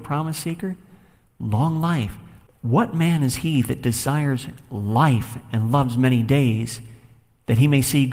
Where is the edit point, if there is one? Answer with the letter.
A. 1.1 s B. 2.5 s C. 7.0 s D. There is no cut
B